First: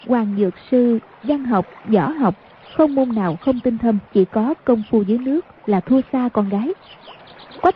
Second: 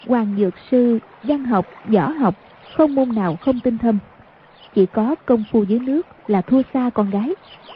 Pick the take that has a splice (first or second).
first